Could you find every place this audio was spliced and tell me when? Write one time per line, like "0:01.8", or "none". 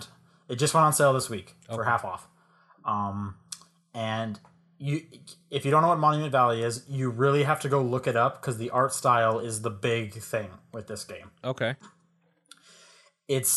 none